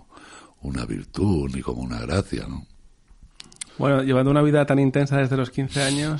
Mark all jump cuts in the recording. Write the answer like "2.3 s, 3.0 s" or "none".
3.7 s